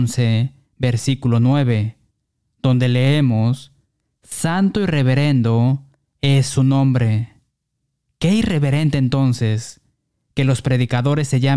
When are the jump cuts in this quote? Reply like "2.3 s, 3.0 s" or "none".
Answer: none